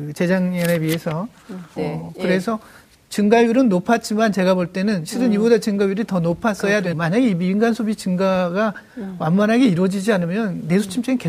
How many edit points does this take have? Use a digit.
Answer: 2